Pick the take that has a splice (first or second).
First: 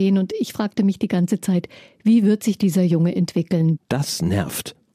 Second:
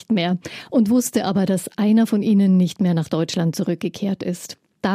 first